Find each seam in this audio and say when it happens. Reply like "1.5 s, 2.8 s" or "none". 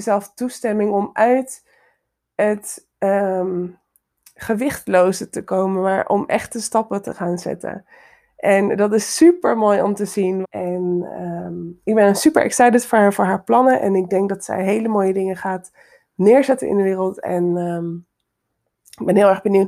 10.4 s